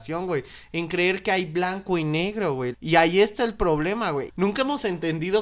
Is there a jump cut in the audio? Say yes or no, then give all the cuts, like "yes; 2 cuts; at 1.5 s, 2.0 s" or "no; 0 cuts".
yes; 2 cuts; at 2.7 s, 4.3 s